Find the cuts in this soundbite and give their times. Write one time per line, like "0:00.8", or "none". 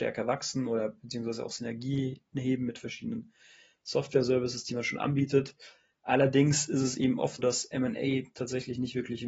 0:07.4